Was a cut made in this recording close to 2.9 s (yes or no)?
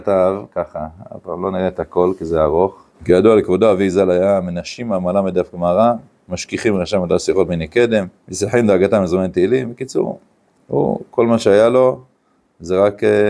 yes